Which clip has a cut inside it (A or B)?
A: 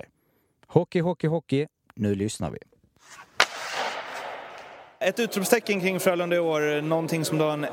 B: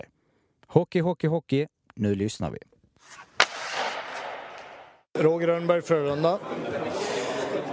A